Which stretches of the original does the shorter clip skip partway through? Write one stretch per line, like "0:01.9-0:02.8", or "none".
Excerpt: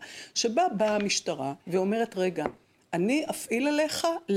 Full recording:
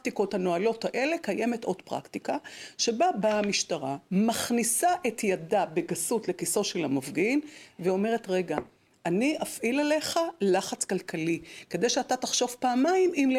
0:04.0-0:07.7

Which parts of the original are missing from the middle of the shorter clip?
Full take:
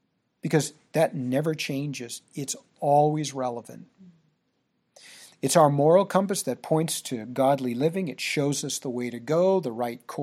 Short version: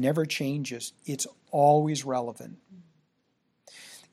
none

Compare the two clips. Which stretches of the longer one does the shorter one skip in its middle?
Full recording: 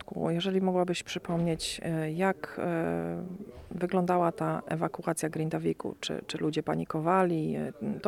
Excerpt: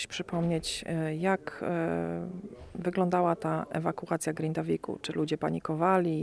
0:06.0-0:06.3

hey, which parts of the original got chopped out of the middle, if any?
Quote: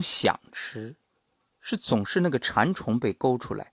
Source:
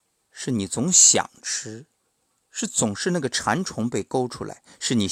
none

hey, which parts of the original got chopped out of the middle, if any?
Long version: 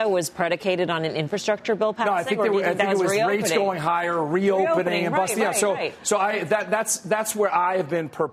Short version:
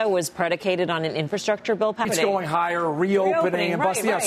0:02.0-0:03.4

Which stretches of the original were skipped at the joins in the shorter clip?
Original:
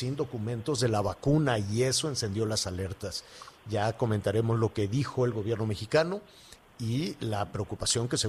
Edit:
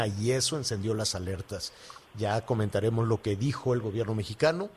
none

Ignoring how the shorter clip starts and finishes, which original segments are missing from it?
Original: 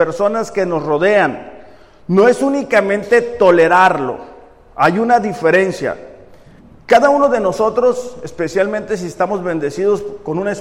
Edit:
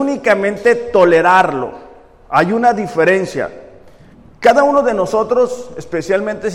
none

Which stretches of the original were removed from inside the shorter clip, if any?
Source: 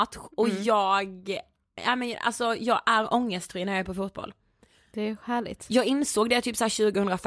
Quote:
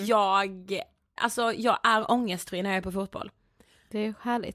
0:01.7-0:02.2

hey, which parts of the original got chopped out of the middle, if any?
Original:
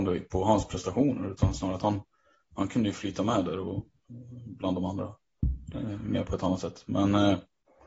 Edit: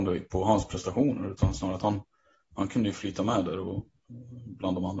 none

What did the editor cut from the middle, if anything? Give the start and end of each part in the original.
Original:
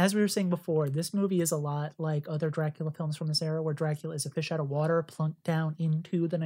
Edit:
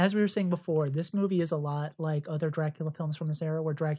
none

